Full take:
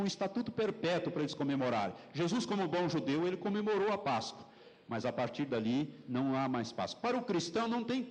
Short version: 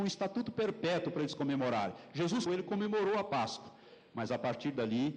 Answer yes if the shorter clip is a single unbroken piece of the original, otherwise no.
no